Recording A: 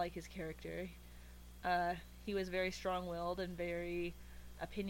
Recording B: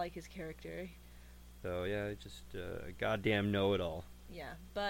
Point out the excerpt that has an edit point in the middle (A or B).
B